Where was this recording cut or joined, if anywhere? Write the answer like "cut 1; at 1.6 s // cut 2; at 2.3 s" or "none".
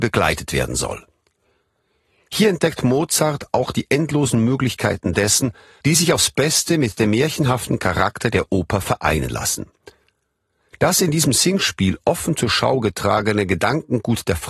cut 1; at 5.8 s

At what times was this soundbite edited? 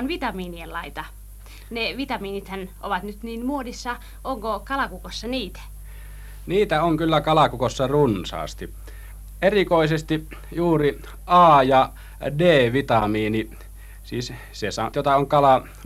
cut 1; at 14.9 s

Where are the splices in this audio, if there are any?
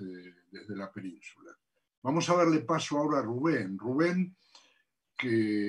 none

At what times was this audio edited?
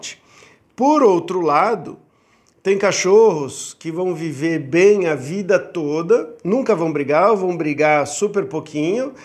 none

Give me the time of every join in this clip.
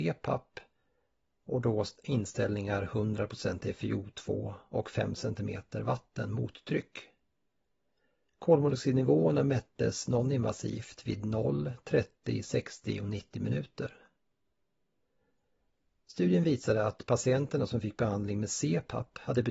none

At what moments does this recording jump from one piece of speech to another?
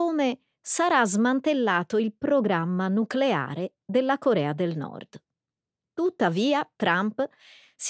none

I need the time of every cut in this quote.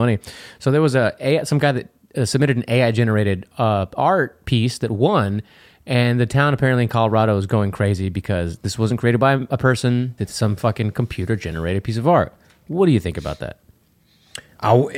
cut 1; at 10.2 s

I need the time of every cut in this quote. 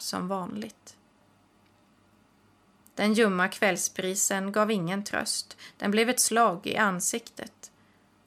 cut 1; at 2.8 s

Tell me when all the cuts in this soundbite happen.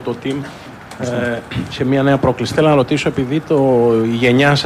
none

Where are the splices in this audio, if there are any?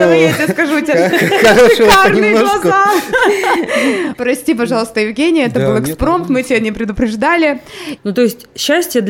cut 1; at 4.1 s // cut 2; at 8.0 s

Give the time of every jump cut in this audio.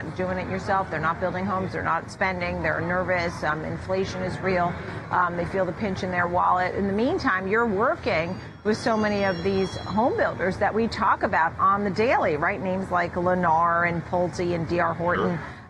none

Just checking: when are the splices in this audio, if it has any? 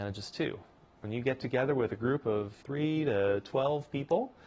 cut 1; at 2.6 s

